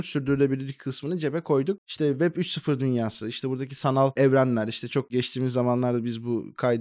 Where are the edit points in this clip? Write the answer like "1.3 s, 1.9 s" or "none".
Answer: 1.8 s